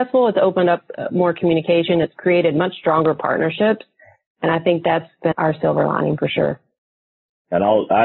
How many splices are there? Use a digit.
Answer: 1